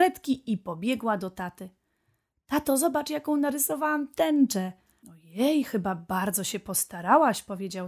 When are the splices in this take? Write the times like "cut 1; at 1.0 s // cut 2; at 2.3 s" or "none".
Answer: cut 1; at 5.0 s